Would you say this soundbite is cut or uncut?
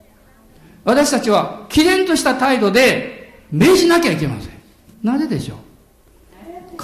cut